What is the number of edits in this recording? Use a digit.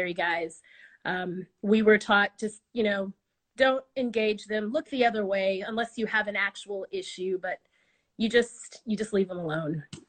0